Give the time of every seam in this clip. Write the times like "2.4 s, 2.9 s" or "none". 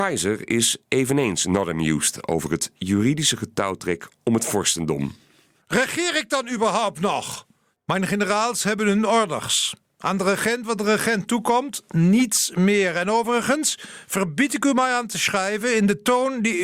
7.7 s